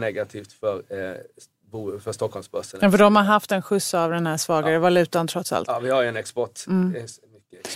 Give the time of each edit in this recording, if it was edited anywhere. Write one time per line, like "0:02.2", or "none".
none